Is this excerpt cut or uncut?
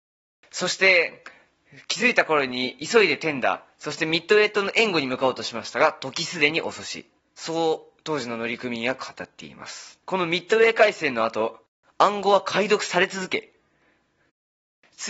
cut